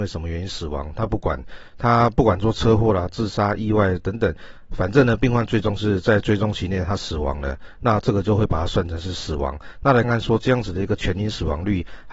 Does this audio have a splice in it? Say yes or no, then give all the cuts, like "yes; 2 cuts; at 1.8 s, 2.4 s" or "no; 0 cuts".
yes; 1 cut; at 10.0 s